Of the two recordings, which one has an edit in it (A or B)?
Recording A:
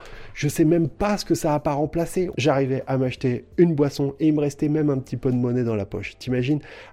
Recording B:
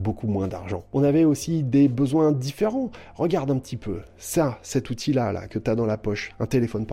A